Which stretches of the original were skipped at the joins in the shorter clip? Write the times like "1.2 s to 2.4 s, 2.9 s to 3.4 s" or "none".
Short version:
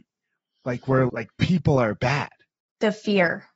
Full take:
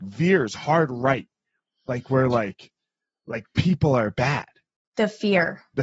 2.3 s to 3.2 s